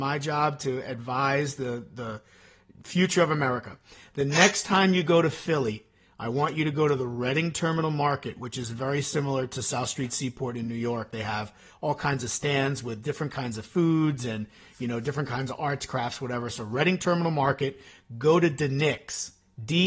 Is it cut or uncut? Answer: uncut